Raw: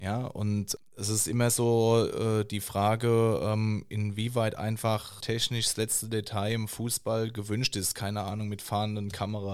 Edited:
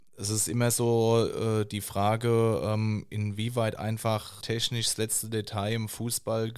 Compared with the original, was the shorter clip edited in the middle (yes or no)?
no